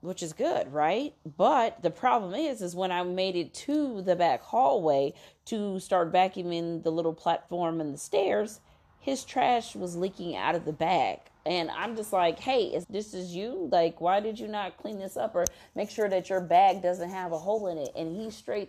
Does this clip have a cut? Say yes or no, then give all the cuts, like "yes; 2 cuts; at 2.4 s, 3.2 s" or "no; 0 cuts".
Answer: yes; 1 cut; at 12.8 s